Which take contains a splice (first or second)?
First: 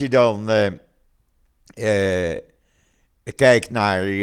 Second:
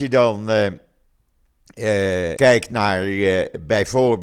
second